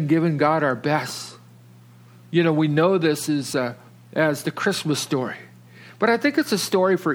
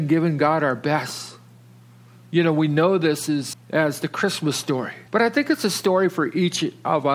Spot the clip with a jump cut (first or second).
second